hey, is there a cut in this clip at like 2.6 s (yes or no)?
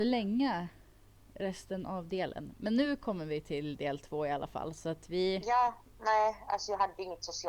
no